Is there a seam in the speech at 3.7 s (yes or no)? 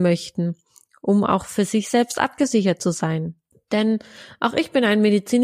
yes